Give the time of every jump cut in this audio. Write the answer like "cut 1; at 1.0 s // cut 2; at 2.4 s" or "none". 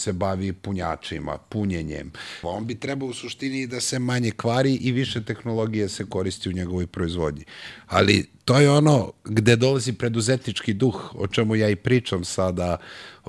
cut 1; at 2.4 s